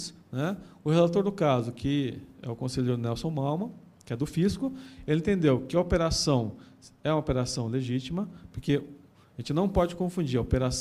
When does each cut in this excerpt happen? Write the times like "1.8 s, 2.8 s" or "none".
none